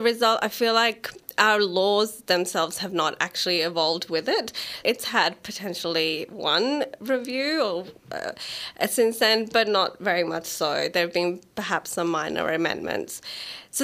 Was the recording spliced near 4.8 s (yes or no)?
yes